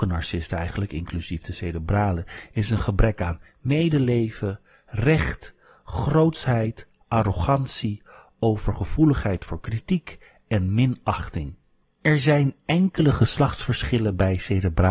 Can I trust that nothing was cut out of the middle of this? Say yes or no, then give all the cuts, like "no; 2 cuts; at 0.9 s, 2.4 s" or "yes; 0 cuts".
no; 1 cut; at 11.8 s